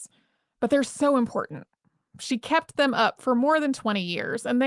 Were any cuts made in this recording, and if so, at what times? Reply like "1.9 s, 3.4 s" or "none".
none